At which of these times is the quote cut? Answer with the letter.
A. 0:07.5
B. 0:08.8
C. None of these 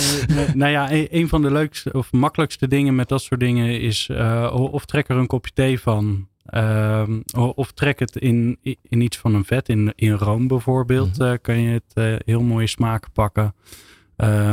B